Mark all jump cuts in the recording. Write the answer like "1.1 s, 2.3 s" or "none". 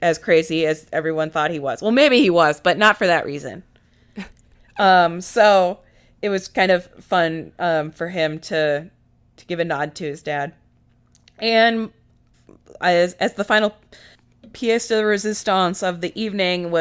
none